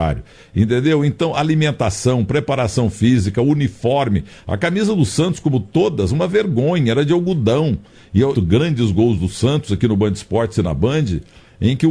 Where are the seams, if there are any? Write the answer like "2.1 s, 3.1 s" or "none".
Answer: 8.3 s